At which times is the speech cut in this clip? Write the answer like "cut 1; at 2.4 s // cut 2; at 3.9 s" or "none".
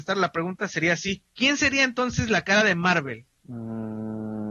cut 1; at 1.3 s // cut 2; at 3.4 s

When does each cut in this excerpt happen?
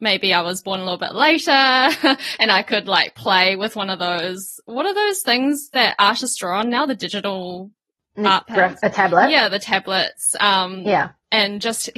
none

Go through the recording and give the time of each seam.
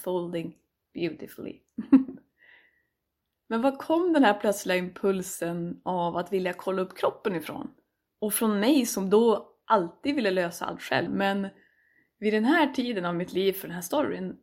cut 1; at 8.1 s // cut 2; at 11.1 s

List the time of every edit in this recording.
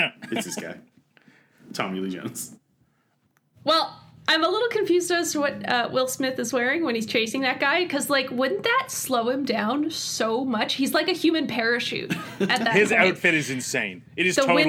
none

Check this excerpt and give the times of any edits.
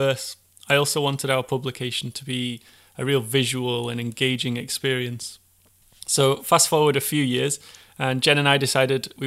none

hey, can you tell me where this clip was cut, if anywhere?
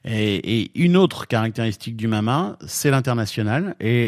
none

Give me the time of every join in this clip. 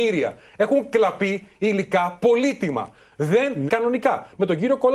cut 1; at 3.7 s

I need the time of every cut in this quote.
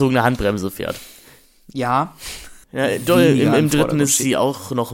cut 1; at 2.6 s

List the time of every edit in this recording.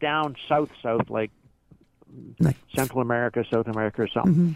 none

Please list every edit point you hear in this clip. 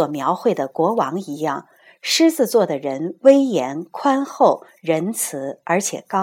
none

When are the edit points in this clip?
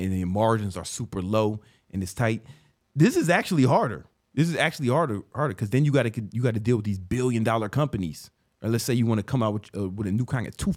none

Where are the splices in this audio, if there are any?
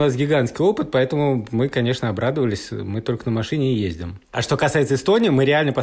none

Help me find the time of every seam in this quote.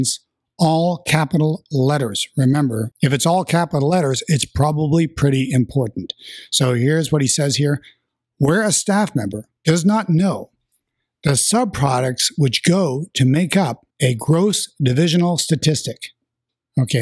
cut 1; at 9.6 s // cut 2; at 13.9 s

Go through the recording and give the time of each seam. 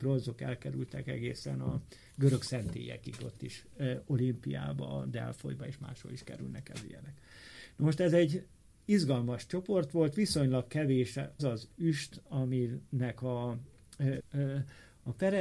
cut 1; at 11.4 s // cut 2; at 14.2 s

